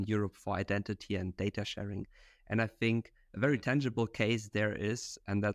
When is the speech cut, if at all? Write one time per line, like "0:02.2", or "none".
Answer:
none